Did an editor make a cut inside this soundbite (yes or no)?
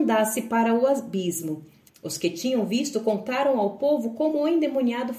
yes